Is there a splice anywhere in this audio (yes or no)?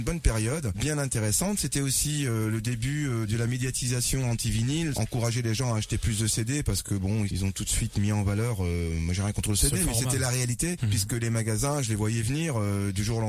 no